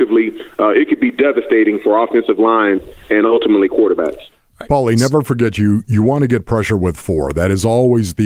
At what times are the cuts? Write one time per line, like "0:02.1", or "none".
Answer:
none